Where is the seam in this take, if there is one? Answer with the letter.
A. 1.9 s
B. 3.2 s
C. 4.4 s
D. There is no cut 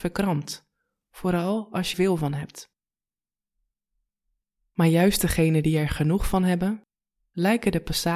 A